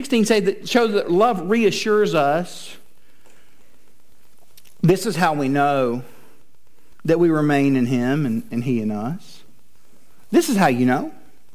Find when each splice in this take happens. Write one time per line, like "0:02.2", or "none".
none